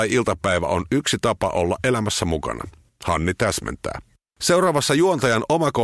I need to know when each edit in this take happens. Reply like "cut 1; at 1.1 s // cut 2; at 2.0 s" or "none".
cut 1; at 2.9 s // cut 2; at 4.3 s